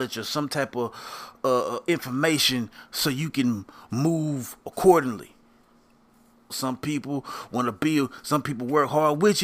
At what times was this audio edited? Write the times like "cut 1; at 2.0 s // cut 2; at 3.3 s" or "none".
cut 1; at 6.5 s